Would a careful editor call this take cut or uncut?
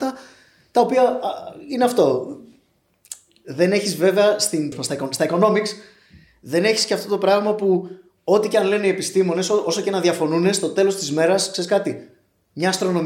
cut